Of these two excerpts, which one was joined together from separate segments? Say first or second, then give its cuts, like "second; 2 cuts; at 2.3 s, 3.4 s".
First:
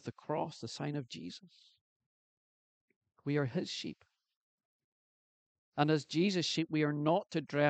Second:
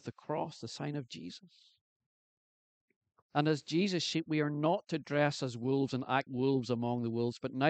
second; 2 cuts; at 3.2 s, 6.3 s